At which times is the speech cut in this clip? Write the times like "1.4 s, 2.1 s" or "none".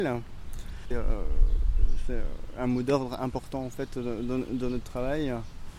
0.9 s